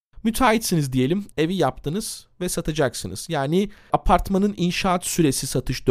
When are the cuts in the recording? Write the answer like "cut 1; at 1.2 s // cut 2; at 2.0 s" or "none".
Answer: cut 1; at 1.3 s